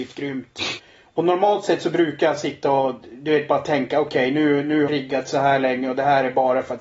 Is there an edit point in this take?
yes; 1 cut; at 4.9 s

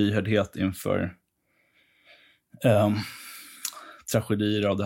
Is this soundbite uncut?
yes; 0 cuts

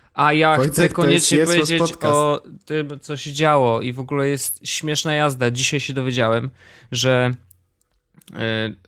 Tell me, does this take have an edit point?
no; 0 cuts

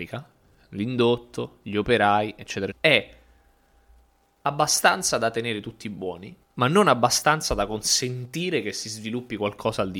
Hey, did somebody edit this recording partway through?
yes; 2 cuts; at 2.7 s, 6.4 s

